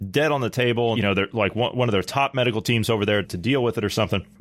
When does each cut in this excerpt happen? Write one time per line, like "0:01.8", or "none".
0:00.9
0:03.2